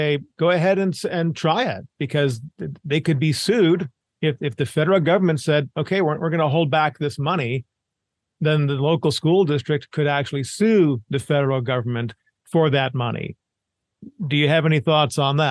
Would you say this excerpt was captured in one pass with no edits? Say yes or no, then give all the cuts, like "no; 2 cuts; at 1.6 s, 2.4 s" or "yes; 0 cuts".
yes; 0 cuts